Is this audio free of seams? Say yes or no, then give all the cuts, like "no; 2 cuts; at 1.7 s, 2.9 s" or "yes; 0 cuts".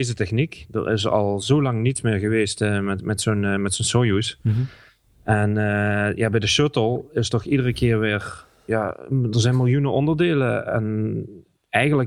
yes; 0 cuts